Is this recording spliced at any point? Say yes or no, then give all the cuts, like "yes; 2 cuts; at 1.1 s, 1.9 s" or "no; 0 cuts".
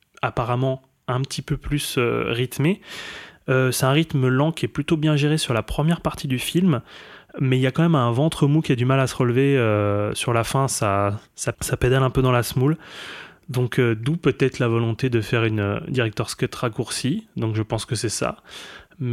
yes; 1 cut; at 11.5 s